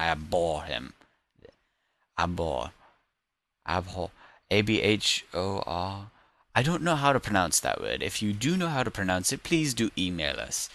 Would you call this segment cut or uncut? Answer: uncut